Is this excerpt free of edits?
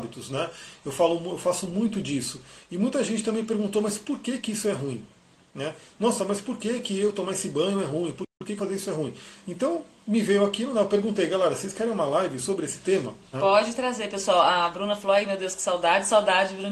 no; 1 cut; at 13.3 s

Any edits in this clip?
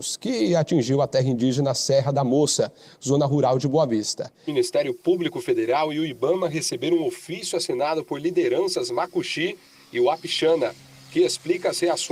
no; 0 cuts

